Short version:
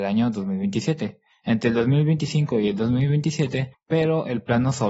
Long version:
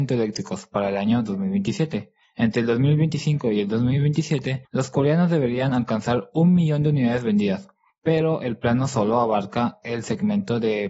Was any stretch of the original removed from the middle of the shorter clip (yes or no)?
yes